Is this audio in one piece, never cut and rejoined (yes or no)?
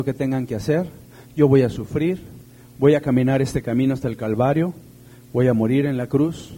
yes